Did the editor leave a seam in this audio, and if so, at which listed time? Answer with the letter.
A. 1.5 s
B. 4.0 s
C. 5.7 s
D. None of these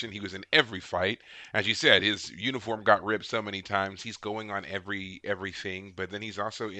B